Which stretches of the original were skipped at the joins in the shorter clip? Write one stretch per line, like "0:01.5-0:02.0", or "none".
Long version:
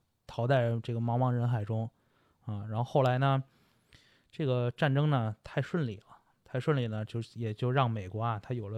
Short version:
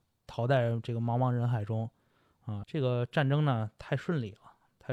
0:02.6-0:04.3